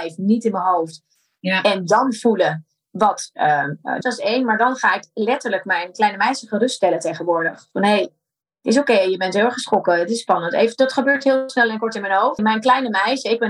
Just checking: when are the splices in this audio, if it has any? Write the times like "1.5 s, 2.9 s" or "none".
4.0 s, 12.4 s